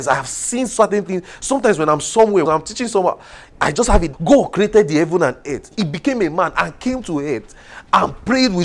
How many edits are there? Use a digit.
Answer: 2